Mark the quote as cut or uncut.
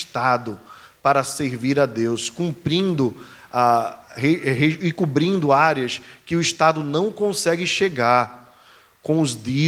uncut